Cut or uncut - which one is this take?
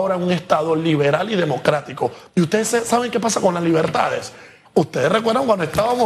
cut